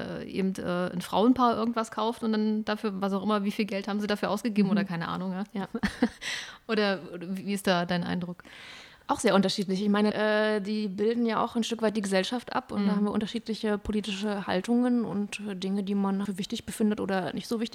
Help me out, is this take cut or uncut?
cut